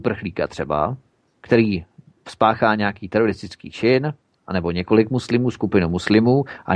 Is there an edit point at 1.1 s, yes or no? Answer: no